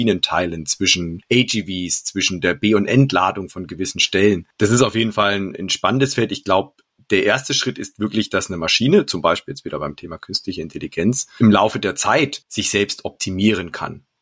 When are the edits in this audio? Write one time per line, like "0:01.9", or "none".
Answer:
none